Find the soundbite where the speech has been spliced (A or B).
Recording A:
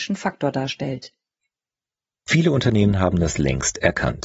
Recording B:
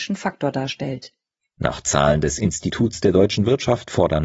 B